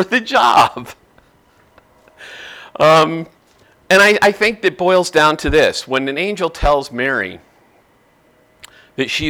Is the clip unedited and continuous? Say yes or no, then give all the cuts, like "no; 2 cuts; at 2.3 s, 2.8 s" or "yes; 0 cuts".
yes; 0 cuts